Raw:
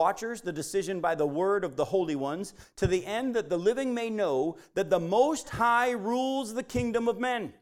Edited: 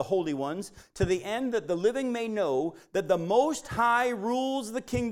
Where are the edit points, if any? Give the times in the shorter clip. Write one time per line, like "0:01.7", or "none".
none